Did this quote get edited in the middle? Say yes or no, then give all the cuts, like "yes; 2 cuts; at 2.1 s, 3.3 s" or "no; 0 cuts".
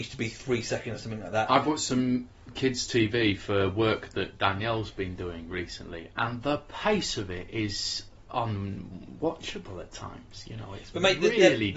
no; 0 cuts